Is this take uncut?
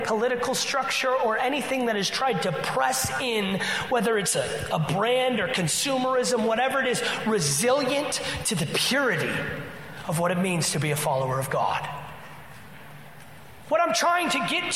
yes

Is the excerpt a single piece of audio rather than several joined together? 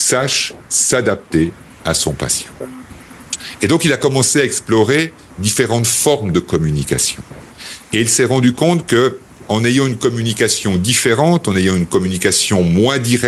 yes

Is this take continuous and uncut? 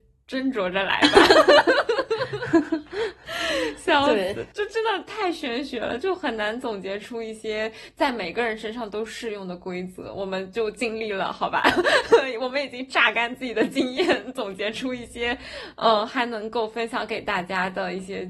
yes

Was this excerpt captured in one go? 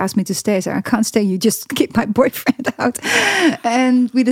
yes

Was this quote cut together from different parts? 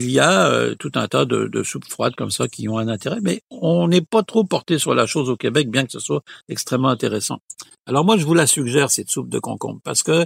no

